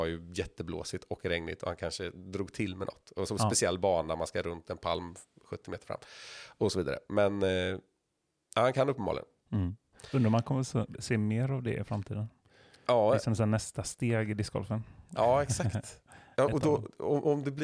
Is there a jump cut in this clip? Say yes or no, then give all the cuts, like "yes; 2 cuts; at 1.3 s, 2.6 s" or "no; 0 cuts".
no; 0 cuts